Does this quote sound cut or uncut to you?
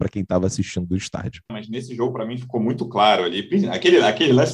cut